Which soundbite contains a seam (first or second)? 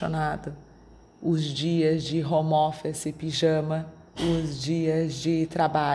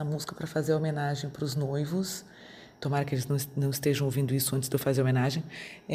first